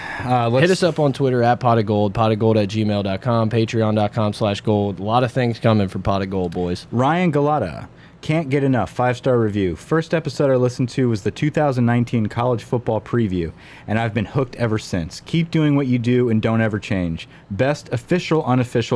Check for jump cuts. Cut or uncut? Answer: uncut